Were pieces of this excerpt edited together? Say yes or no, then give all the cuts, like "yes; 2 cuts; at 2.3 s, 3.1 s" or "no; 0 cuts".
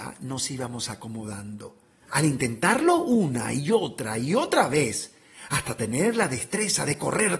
no; 0 cuts